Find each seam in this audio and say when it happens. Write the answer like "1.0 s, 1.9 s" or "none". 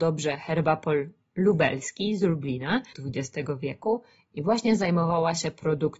2.9 s